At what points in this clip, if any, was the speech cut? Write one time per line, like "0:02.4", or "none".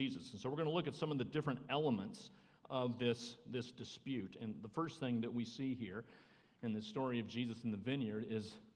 none